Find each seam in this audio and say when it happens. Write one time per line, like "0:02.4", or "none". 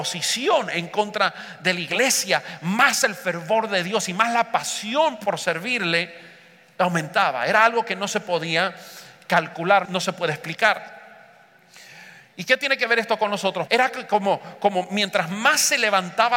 0:09.9
0:13.7